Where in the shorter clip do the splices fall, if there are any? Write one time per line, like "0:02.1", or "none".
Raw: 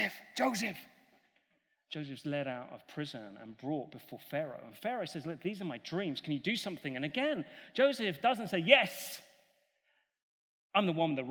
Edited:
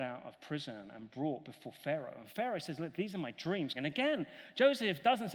0:03.7